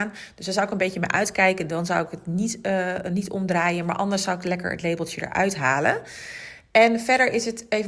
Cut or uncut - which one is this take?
uncut